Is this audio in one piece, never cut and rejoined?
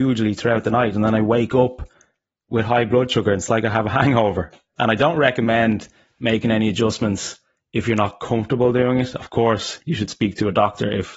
no; 1 cut; at 4.8 s

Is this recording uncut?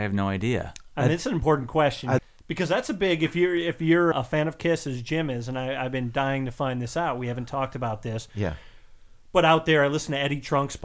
no; 2 cuts; at 2.2 s, 4.1 s

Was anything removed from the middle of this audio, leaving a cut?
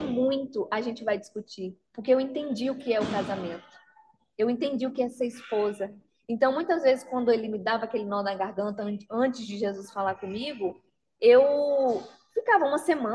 no; 0 cuts

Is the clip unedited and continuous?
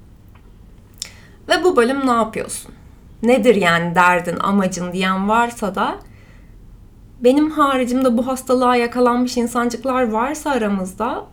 yes; 0 cuts

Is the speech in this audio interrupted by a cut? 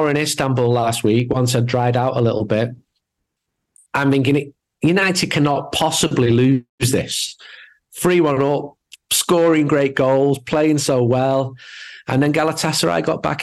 no; 0 cuts

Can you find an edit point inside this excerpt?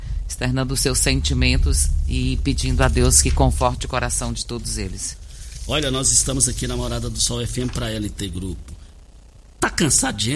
no; 0 cuts

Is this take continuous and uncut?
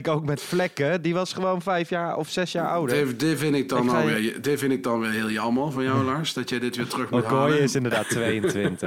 yes; 0 cuts

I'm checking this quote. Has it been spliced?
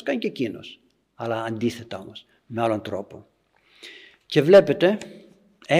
no; 0 cuts

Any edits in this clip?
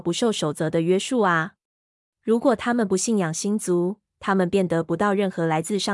yes; 1 cut; at 2.0 s

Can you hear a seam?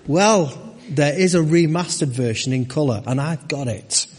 no; 0 cuts

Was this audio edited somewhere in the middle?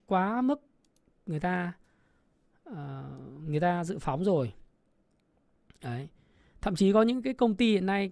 no; 0 cuts

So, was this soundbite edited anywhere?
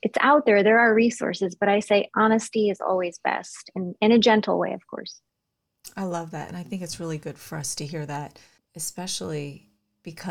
yes; 1 cut; at 8.6 s

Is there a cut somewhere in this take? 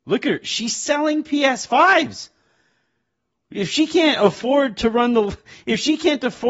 no; 0 cuts

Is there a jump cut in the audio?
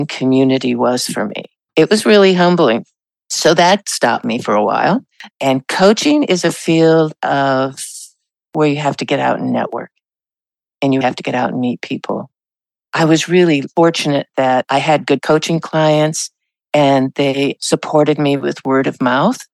yes; 3 cuts; at 1.7 s, 5.3 s, 11.0 s

